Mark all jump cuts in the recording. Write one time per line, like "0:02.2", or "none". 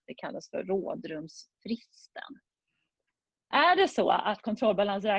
none